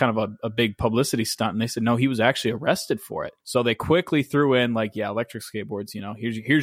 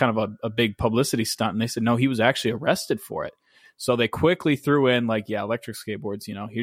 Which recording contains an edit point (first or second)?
first